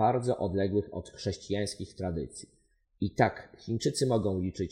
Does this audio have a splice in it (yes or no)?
no